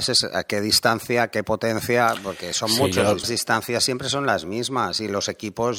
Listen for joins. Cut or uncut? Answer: cut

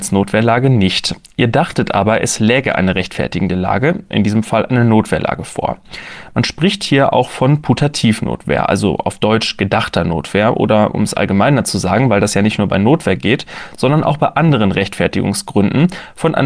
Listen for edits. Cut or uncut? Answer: uncut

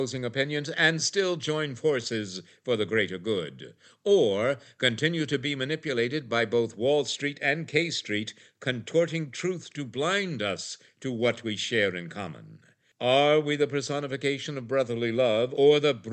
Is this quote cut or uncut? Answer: uncut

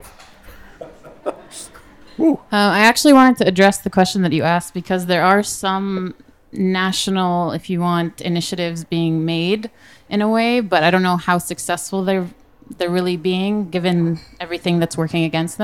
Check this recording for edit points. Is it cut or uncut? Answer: uncut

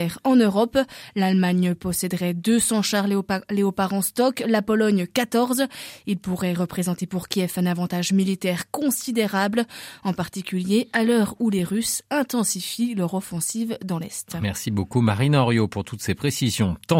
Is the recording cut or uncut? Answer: uncut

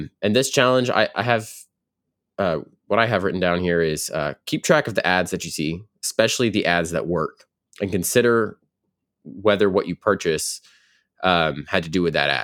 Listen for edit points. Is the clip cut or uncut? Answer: uncut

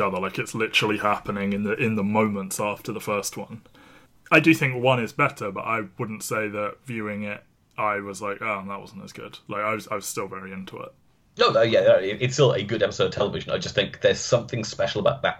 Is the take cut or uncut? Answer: uncut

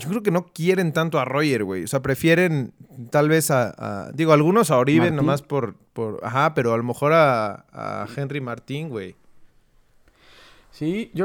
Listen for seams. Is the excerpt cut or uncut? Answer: uncut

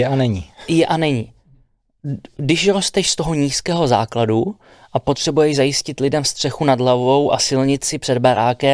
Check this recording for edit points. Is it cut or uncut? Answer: uncut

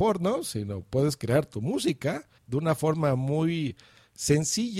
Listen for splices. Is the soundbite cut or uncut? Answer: cut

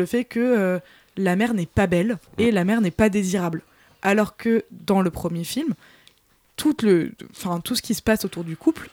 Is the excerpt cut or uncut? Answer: cut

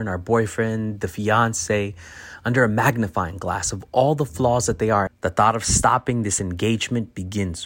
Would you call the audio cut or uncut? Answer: cut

